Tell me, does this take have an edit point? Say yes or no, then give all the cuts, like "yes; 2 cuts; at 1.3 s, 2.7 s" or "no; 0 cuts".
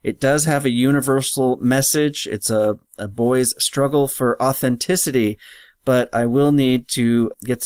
no; 0 cuts